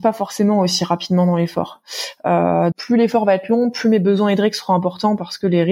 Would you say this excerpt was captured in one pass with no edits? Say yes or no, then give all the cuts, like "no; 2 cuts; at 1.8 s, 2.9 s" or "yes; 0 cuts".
no; 1 cut; at 2.7 s